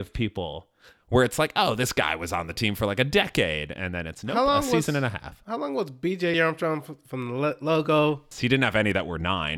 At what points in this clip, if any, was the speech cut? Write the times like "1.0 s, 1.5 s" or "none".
6.3 s, 8.3 s